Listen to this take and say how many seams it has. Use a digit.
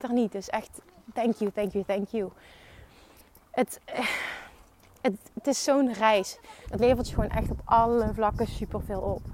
1